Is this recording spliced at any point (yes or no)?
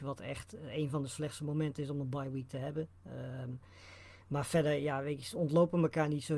no